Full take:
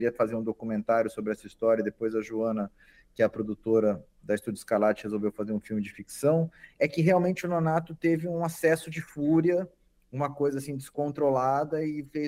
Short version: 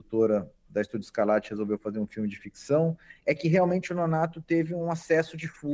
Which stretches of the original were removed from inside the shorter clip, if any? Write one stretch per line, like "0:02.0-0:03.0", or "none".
none